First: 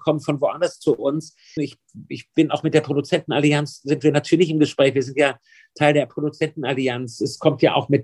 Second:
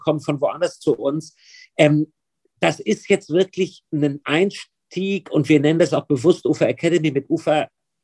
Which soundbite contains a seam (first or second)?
first